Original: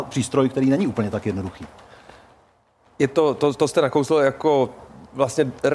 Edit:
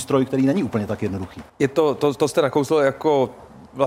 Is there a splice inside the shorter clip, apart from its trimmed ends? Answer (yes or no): yes